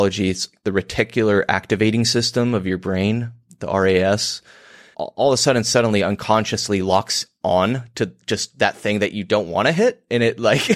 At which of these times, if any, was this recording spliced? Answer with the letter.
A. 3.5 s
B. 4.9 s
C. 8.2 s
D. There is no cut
B